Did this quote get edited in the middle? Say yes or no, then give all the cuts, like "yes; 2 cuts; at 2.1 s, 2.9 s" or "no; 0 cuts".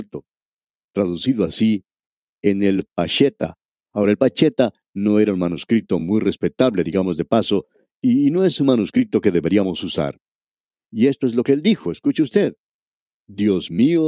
no; 0 cuts